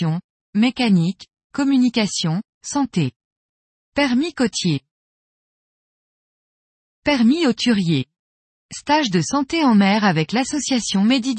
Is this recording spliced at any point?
yes; 2 cuts; at 3.8 s, 8.6 s

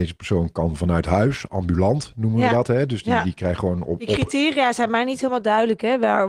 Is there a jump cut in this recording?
no; 0 cuts

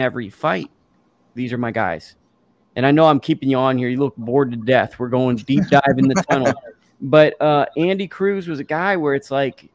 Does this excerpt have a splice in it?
yes; 1 cut; at 1.4 s

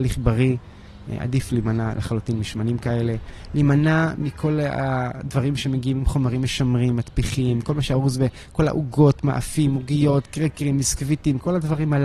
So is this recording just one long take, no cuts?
yes; 0 cuts

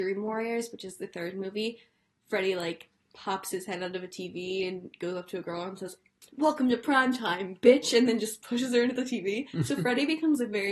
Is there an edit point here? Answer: no; 0 cuts

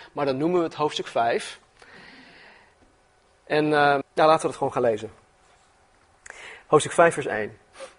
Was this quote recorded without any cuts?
no; 1 cut; at 4.0 s

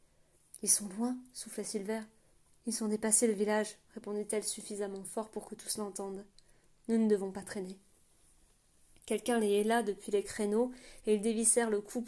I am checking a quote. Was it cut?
no; 0 cuts

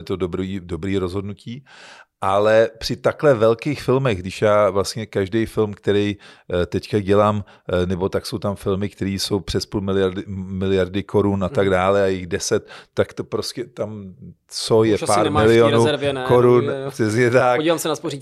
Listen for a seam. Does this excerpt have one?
no; 0 cuts

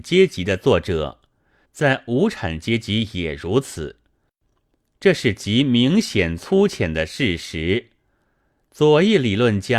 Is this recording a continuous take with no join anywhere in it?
no; 1 cut; at 1.7 s

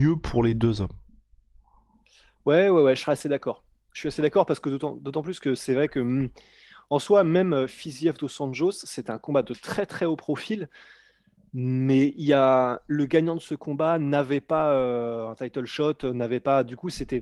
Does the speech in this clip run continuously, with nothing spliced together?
yes; 0 cuts

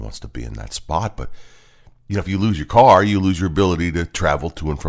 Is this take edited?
no; 0 cuts

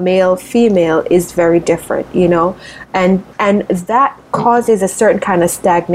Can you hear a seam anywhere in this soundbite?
yes; 1 cut; at 3.3 s

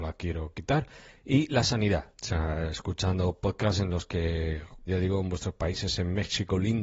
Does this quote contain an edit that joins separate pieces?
yes; 2 cuts; at 2.1 s, 4.9 s

